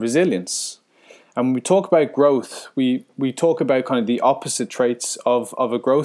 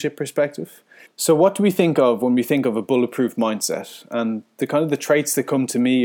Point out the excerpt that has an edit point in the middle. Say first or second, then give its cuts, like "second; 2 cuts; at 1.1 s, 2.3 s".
second; 1 cut; at 1.1 s